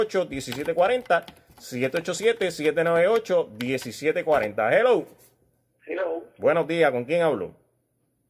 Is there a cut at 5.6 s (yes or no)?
no